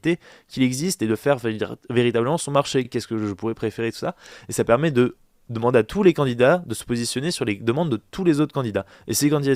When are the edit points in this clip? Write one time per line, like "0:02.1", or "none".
none